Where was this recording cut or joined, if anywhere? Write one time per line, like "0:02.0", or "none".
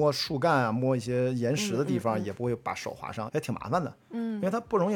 0:03.3